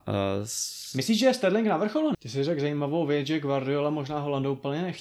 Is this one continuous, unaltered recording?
no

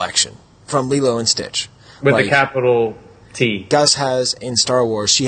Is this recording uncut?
no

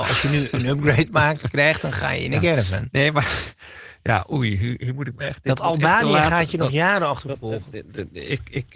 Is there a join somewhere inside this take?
no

